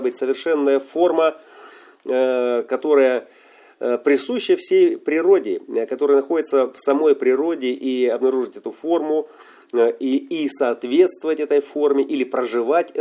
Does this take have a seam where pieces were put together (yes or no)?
no